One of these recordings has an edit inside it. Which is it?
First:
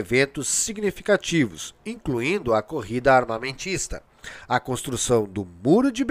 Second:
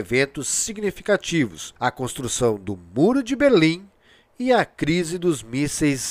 second; 1 cut; at 1.8 s

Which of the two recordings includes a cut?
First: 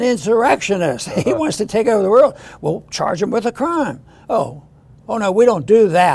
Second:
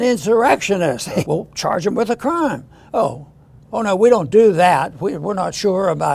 second; 1 cut; at 1.2 s

